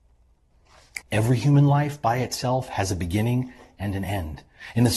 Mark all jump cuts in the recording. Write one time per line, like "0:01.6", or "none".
0:01.0